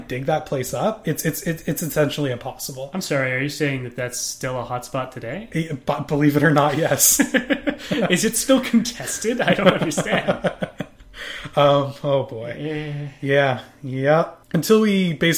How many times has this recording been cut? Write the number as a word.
one